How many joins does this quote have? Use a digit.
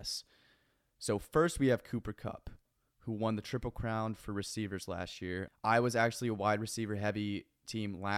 1